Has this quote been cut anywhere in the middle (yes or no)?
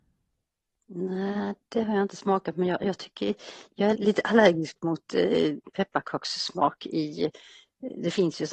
yes